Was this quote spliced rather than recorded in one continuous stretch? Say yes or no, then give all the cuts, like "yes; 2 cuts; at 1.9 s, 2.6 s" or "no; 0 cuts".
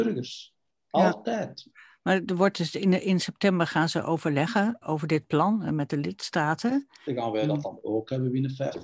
yes; 2 cuts; at 4.8 s, 7.1 s